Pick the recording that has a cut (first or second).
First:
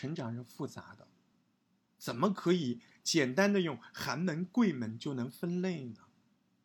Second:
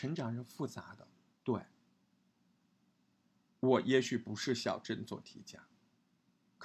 second